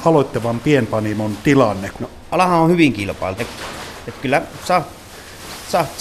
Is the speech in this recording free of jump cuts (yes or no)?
no